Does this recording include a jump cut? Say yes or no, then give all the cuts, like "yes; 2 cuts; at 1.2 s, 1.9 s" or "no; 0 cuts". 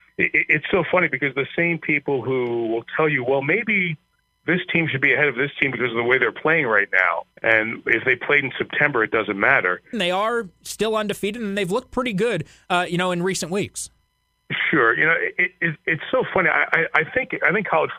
yes; 2 cuts; at 7.3 s, 9.9 s